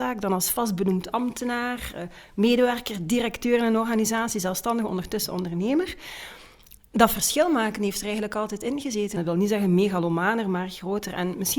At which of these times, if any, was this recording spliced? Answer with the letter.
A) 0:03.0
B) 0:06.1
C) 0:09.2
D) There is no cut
C